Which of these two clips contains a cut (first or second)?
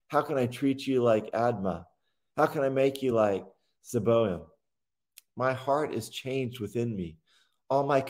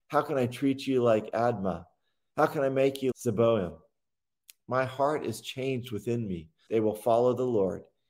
second